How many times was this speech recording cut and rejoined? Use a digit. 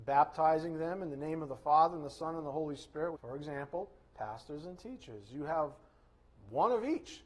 1